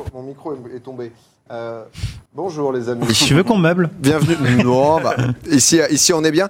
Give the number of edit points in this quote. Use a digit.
1